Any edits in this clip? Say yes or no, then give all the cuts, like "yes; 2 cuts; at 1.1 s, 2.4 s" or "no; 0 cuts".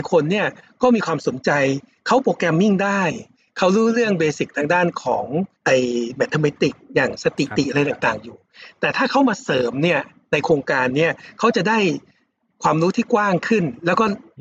yes; 1 cut; at 5.5 s